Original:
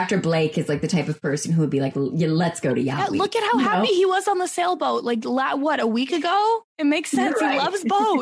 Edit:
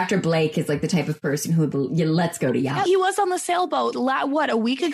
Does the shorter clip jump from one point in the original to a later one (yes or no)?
yes